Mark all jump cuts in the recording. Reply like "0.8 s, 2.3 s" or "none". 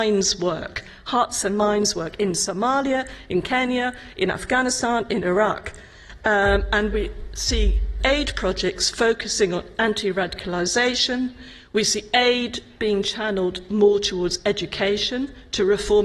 8.0 s